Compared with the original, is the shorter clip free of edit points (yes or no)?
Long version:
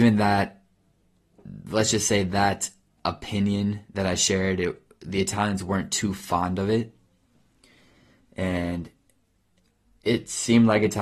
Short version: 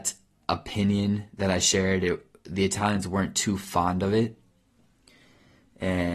yes